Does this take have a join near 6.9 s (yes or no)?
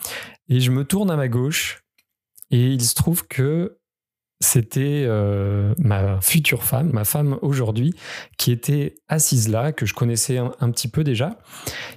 yes